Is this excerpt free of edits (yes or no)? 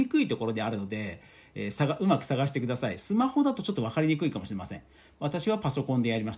yes